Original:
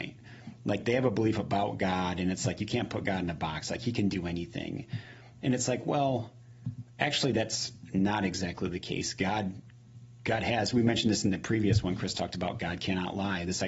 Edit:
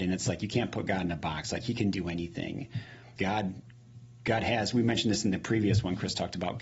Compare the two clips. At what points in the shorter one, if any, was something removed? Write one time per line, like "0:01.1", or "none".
0:03.2